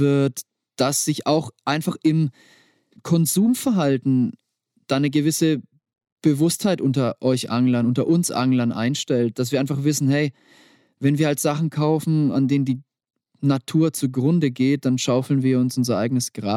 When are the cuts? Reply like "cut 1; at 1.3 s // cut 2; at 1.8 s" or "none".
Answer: cut 1; at 3.0 s